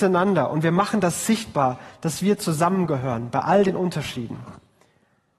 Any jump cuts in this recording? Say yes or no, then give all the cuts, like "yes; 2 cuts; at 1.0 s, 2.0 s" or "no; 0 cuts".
no; 0 cuts